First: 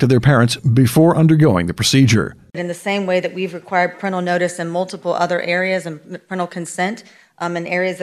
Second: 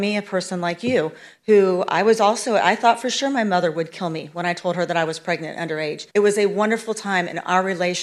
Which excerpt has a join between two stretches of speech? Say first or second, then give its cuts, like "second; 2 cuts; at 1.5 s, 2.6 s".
second; 1 cut; at 6.1 s